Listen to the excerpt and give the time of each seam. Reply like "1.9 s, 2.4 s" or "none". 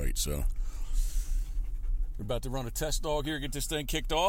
none